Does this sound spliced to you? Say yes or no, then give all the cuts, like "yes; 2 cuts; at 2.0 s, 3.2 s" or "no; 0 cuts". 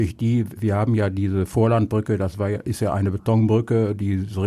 no; 0 cuts